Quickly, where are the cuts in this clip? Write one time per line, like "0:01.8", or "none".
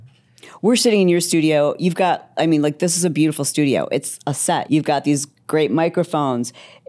0:04.7